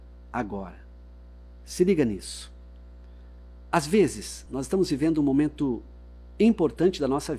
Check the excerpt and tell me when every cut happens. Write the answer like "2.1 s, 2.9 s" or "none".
none